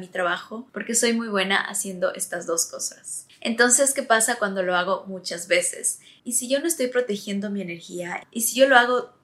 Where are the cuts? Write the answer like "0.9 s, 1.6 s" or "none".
6.2 s